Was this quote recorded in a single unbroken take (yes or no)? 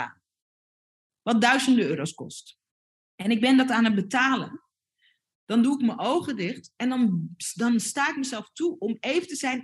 yes